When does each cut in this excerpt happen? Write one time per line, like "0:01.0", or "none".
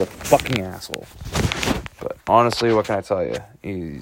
none